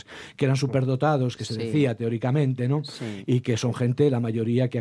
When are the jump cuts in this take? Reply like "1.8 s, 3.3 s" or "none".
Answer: none